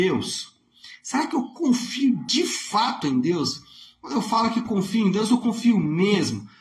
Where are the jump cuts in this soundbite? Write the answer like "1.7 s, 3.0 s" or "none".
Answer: none

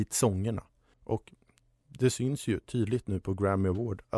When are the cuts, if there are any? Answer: 0.9 s

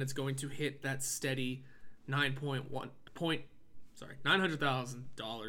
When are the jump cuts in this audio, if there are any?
3.1 s

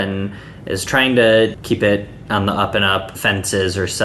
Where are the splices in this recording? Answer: 1.5 s, 3.1 s

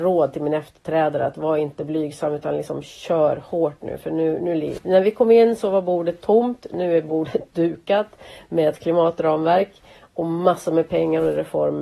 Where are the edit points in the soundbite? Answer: 4.8 s

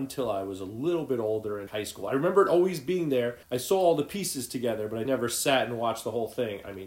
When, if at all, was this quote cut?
1.7 s, 3.4 s, 5.0 s

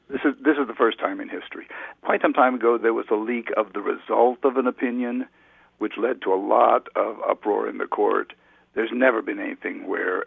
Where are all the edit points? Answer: none

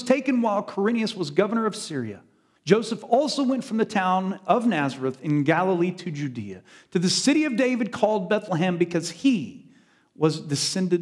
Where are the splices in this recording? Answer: 2.6 s

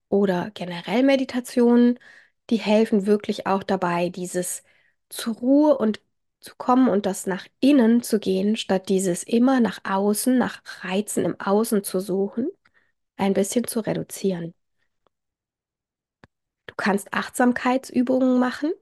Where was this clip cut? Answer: 16.6 s

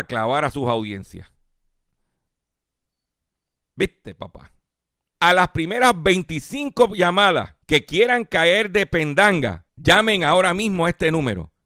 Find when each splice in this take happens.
5.1 s, 7.6 s, 9.7 s

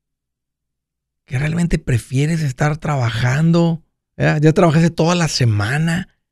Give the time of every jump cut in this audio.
none

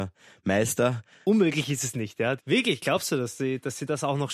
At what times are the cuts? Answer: 1.2 s, 2.4 s

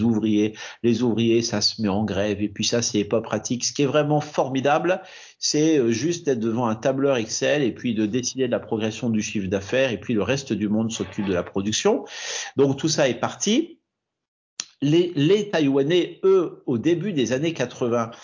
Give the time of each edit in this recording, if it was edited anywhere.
none

